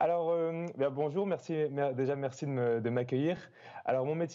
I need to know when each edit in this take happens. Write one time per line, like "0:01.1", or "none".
none